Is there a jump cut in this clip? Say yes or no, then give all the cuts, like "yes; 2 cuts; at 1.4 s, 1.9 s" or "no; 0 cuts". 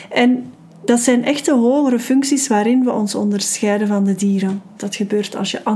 yes; 1 cut; at 4.8 s